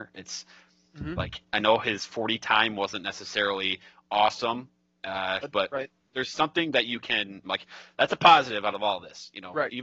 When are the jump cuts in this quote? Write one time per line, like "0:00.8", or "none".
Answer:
0:05.4
0:07.4